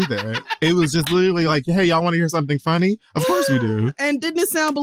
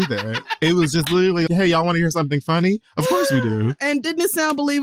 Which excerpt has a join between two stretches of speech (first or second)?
second